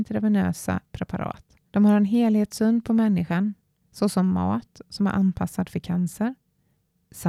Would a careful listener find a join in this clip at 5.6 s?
no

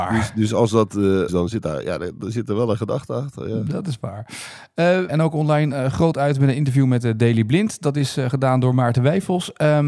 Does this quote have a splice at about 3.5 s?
no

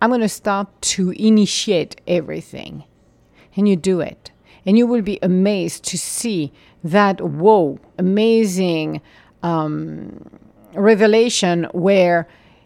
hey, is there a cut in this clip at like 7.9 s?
yes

